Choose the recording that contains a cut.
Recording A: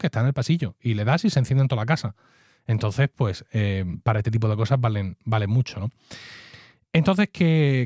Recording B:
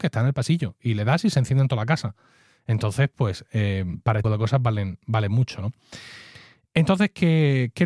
B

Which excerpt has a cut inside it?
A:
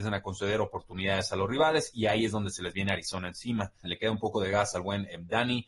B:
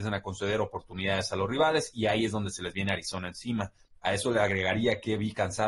A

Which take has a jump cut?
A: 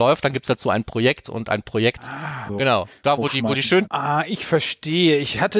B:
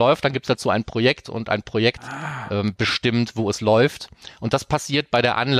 A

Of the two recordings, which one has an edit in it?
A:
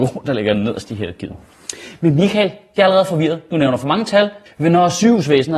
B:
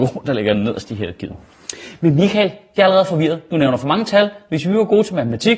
A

